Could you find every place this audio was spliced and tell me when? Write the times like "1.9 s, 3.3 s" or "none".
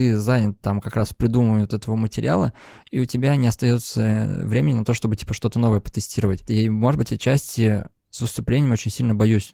none